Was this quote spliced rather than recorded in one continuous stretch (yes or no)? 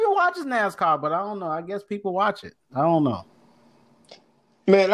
no